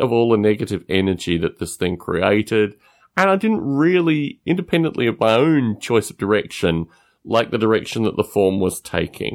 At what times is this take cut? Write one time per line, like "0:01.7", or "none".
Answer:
none